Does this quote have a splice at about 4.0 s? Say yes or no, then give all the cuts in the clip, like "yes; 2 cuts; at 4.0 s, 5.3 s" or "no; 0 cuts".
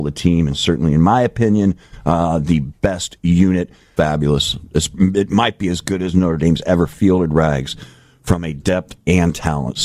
yes; 1 cut; at 4.0 s